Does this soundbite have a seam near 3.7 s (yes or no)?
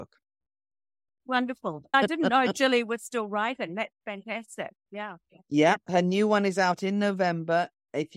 no